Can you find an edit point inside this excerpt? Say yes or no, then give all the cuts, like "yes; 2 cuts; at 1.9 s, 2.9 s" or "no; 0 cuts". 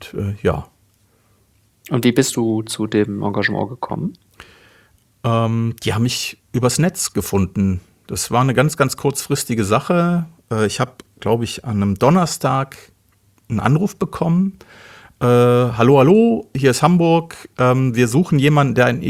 no; 0 cuts